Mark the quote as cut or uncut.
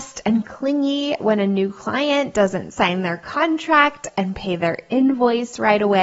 uncut